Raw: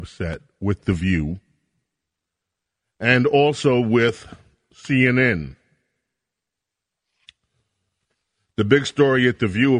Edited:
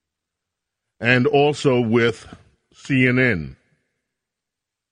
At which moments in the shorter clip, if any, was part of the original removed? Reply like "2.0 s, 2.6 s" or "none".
none